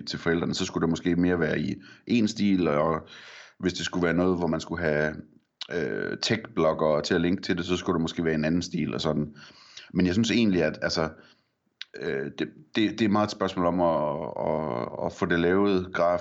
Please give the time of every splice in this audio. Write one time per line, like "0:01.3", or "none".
none